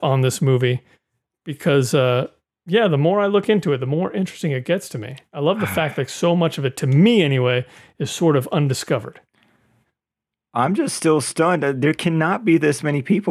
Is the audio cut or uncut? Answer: uncut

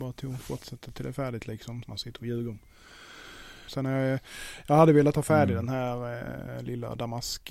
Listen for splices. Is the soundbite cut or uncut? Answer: cut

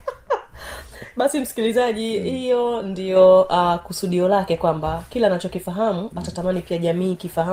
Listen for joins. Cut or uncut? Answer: uncut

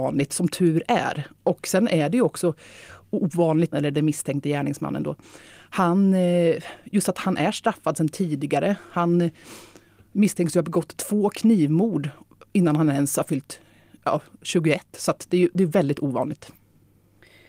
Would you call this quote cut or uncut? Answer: cut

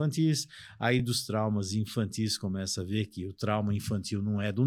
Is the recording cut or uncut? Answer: uncut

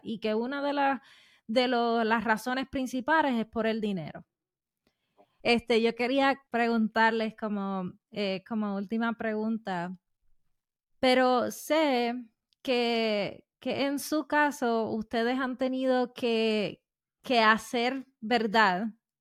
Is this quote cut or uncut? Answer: cut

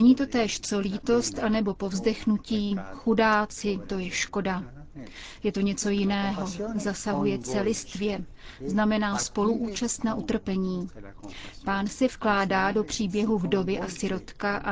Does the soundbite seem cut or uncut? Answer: uncut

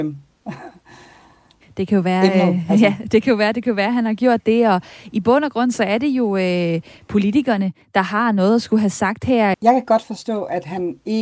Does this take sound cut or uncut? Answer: cut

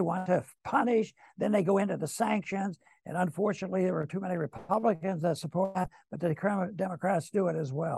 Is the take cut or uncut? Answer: uncut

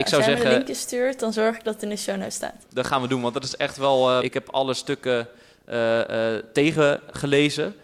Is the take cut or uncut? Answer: cut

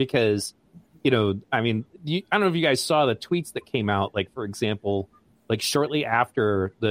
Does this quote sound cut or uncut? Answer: uncut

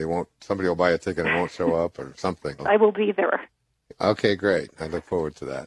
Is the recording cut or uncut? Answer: cut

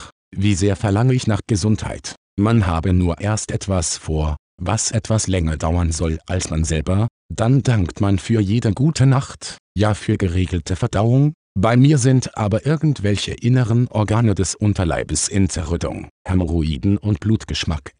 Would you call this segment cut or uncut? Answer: cut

